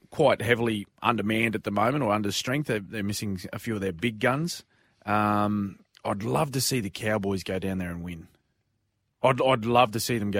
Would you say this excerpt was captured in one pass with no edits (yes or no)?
yes